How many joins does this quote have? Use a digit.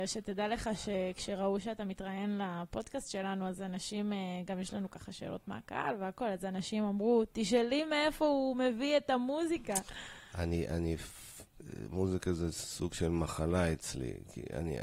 0